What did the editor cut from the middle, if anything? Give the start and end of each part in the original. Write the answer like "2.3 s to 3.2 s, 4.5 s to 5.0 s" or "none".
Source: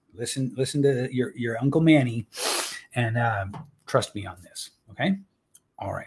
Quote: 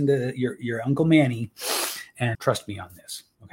3.1 s to 3.8 s